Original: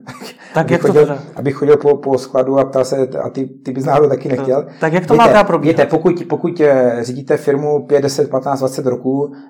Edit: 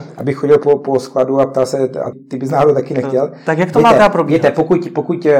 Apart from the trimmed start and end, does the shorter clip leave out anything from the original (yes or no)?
yes